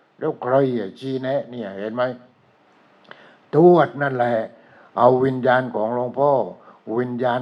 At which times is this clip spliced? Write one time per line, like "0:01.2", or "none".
none